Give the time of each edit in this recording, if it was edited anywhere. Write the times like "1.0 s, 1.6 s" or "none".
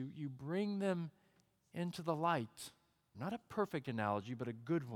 3.1 s